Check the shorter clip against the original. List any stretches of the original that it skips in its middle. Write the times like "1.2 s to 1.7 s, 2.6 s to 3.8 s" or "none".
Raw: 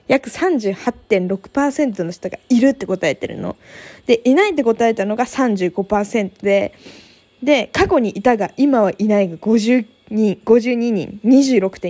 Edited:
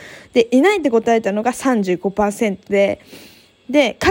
none